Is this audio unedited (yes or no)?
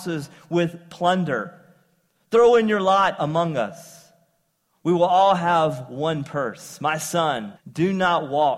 no